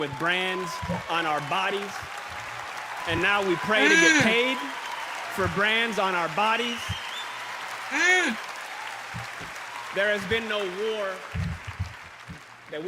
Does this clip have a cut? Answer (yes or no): no